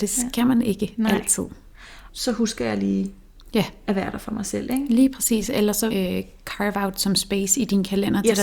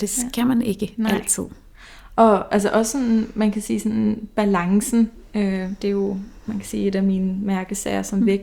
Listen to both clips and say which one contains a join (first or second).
first